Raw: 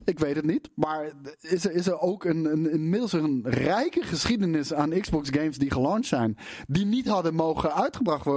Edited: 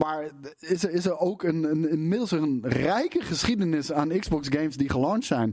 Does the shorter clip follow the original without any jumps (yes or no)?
yes